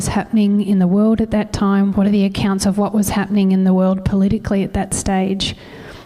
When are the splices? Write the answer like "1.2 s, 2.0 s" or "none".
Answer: 1.9 s